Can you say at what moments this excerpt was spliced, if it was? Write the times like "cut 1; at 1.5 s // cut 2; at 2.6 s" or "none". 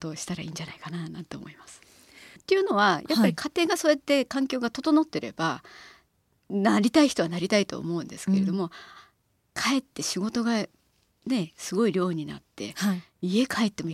cut 1; at 2.4 s